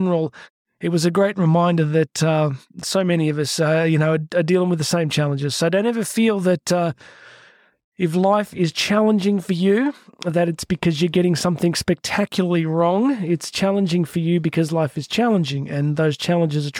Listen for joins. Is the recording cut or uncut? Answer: uncut